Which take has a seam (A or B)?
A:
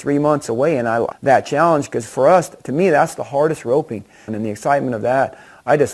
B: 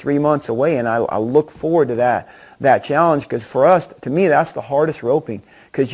A